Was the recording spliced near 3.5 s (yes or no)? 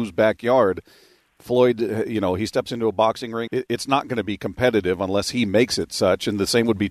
yes